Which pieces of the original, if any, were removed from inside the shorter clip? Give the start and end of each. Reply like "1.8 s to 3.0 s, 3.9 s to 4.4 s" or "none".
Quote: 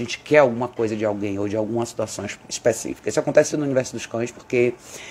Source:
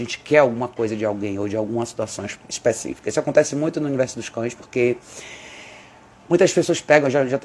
3.5 s to 3.7 s